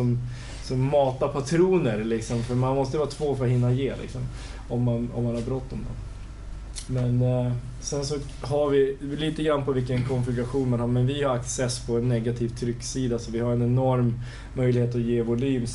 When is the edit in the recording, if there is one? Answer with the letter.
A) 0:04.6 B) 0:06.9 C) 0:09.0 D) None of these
B